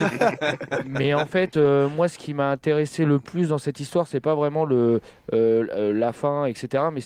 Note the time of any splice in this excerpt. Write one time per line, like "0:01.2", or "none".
none